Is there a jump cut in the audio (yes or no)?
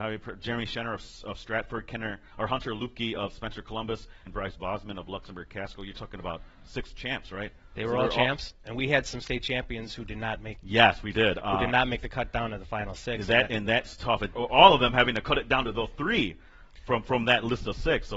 yes